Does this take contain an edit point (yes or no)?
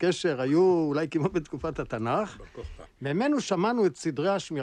yes